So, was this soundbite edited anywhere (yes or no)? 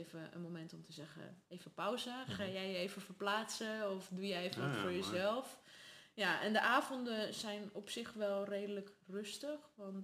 no